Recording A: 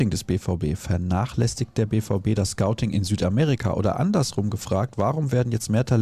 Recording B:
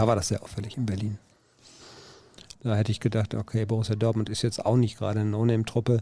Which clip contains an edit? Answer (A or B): B